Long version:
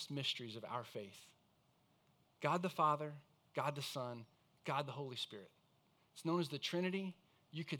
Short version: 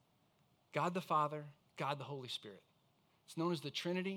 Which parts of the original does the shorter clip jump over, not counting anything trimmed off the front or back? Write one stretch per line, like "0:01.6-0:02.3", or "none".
0:03.3-0:04.5